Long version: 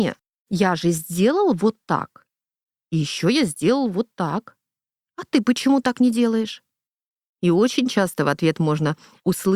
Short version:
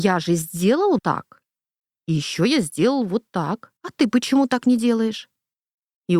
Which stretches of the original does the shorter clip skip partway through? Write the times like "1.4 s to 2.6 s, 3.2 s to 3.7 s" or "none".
1.5 s to 1.8 s, 4.6 s to 5.1 s